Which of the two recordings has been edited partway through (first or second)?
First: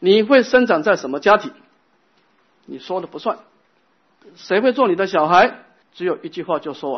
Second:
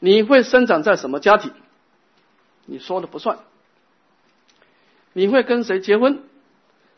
first